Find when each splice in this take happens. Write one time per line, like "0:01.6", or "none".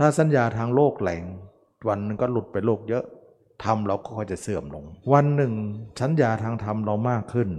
0:05.0